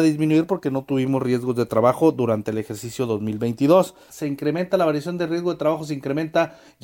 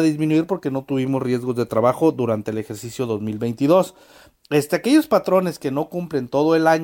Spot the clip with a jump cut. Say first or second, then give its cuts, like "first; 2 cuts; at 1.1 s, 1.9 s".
first; 1 cut; at 4.1 s